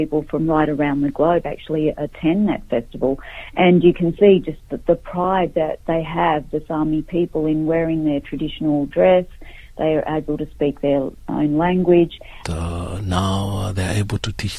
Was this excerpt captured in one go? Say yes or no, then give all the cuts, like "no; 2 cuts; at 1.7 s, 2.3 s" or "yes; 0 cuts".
no; 2 cuts; at 5.8 s, 12.4 s